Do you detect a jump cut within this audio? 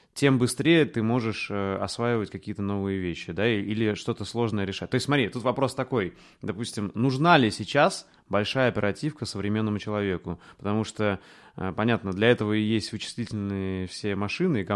no; 0 cuts

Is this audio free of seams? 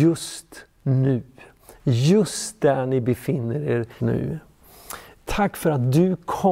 no; 2 cuts; at 4.0 s, 5.2 s

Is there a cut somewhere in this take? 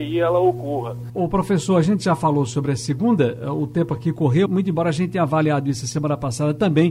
yes; 2 cuts; at 1.1 s, 4.5 s

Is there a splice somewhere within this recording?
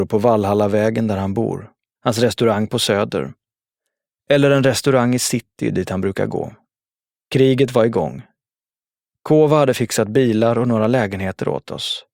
yes; 2 cuts; at 2.0 s, 7.1 s

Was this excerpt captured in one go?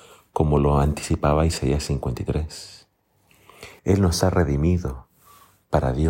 no; 1 cut; at 3.8 s

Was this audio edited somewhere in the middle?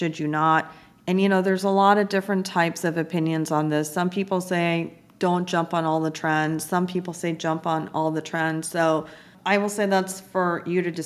no; 0 cuts

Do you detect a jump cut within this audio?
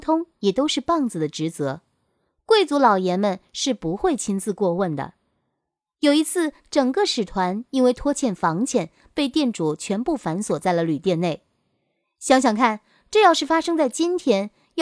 no; 0 cuts

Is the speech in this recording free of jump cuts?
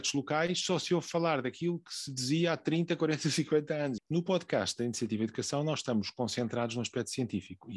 no; 1 cut; at 4.0 s

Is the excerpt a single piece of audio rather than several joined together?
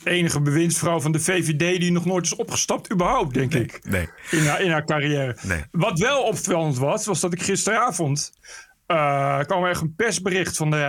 no; 1 cut; at 8.4 s

